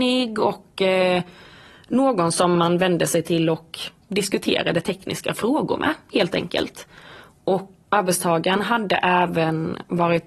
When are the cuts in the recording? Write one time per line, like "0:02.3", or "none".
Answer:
0:07.8

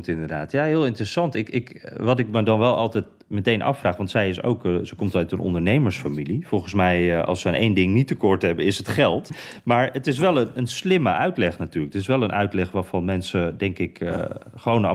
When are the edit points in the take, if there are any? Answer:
0:09.3

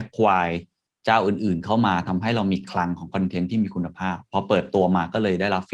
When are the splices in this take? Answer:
none

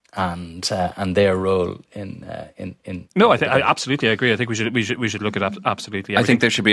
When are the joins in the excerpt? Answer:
none

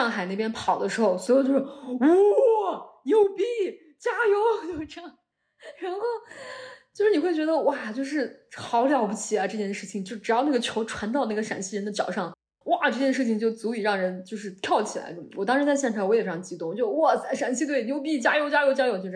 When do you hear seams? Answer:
none

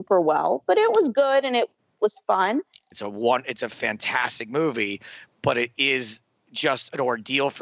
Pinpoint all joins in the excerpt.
0:02.9

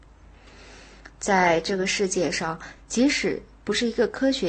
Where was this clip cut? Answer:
none

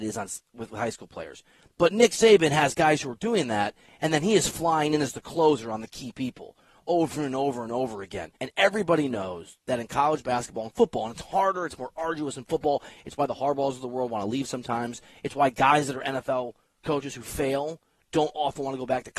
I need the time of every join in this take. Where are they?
0:01.7
0:08.4

